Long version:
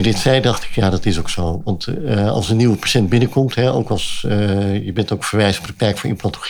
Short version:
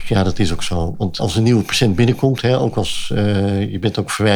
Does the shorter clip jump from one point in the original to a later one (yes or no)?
yes